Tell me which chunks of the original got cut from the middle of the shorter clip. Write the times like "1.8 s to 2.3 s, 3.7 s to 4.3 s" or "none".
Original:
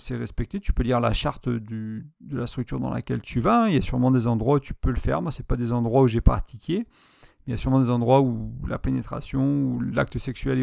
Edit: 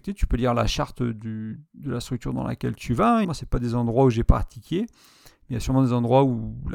3.7 s to 5.2 s